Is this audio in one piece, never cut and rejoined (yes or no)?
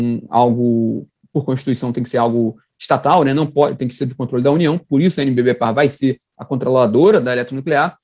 yes